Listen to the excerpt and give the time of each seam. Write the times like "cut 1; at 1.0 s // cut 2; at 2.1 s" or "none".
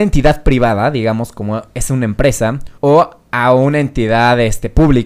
cut 1; at 2.8 s